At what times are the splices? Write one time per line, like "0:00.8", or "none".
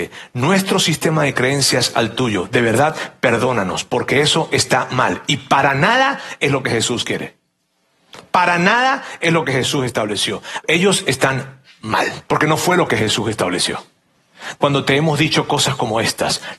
0:10.6
0:12.2
0:14.6

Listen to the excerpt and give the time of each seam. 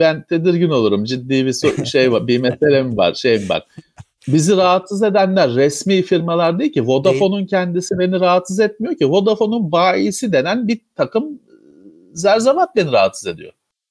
none

